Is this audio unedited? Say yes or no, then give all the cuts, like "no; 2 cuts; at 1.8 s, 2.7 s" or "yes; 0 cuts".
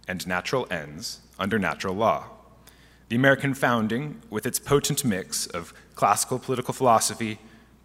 yes; 0 cuts